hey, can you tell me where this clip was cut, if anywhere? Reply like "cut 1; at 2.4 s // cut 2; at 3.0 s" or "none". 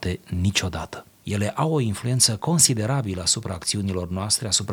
cut 1; at 1.2 s